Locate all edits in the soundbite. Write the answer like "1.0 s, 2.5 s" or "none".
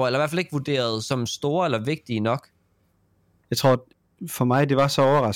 3.4 s